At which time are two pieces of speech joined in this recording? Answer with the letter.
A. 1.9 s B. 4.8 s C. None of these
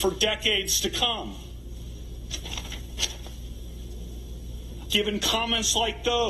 B